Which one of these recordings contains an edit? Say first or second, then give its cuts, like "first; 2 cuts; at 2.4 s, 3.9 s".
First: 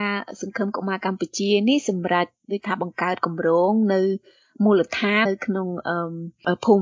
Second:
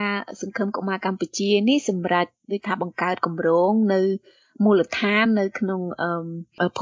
first; 1 cut; at 5.2 s